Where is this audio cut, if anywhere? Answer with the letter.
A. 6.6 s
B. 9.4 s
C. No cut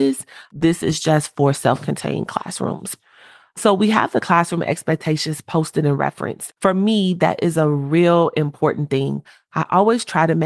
A